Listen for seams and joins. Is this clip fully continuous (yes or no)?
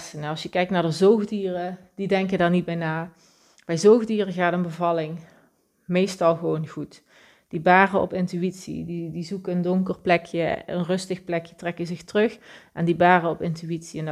yes